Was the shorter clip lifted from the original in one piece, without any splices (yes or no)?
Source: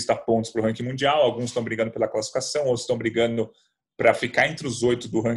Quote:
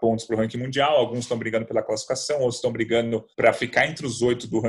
no